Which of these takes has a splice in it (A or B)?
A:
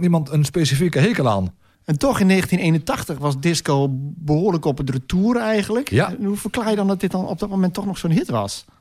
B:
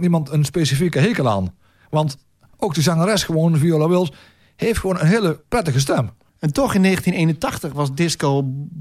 A